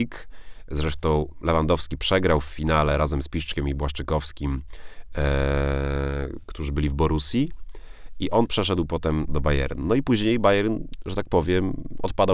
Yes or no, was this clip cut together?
yes